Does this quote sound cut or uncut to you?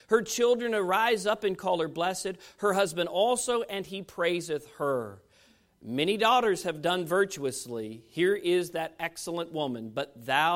uncut